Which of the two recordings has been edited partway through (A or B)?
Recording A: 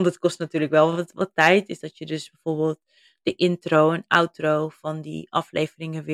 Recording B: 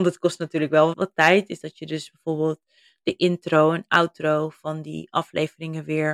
B